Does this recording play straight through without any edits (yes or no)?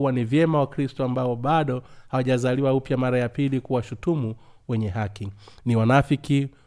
yes